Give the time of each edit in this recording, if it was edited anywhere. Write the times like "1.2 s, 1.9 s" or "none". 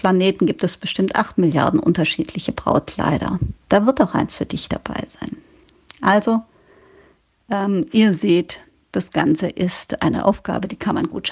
none